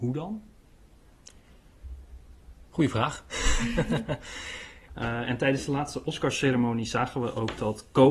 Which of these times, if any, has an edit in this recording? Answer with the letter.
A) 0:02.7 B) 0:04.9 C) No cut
B